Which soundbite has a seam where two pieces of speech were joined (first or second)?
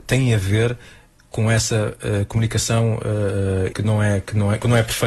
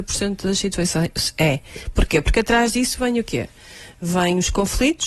first